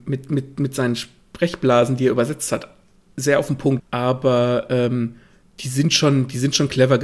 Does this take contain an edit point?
yes; 1 cut; at 3.8 s

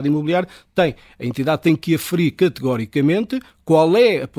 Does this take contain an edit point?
no; 0 cuts

